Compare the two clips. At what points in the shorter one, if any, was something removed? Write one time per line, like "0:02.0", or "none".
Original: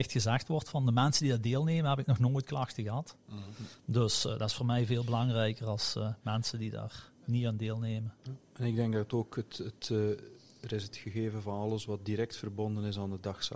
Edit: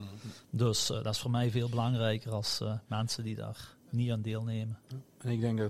none